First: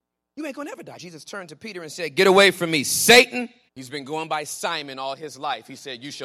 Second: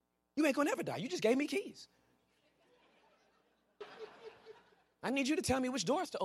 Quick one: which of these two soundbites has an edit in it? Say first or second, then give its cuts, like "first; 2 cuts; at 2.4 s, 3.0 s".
first; 2 cuts; at 1.0 s, 3.7 s